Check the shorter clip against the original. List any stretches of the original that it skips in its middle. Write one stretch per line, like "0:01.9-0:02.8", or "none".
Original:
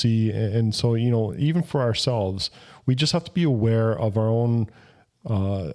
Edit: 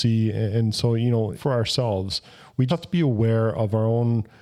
0:01.3-0:01.6
0:03.0-0:03.1